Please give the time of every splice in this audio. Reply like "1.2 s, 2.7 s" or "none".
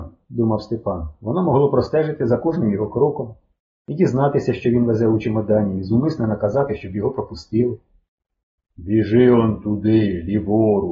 8.6 s

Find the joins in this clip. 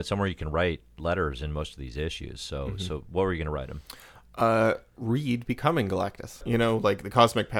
6.4 s

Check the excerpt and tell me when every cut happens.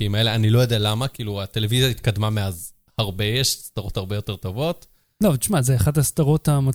none

